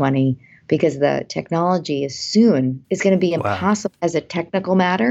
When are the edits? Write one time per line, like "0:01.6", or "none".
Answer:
0:02.8